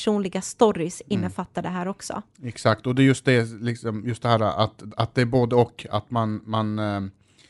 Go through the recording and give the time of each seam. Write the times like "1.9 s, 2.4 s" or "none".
none